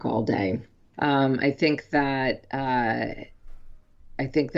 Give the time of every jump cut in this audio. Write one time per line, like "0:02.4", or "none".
0:00.9